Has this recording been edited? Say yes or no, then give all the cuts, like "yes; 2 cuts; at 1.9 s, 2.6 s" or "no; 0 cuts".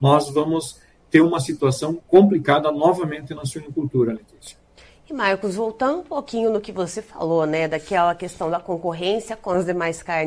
no; 0 cuts